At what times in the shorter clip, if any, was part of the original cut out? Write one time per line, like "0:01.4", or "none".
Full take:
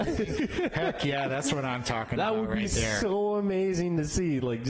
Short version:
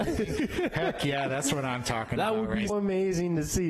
0:02.7